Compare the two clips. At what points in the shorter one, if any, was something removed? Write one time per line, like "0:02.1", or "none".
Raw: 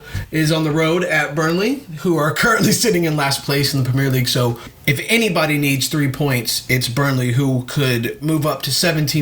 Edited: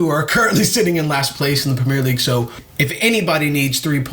none